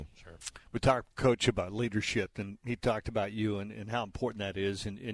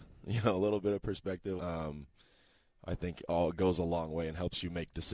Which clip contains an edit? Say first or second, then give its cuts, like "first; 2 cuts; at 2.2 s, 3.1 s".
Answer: second; 1 cut; at 1.6 s